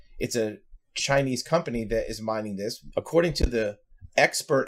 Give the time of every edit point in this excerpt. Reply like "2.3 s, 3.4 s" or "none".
2.9 s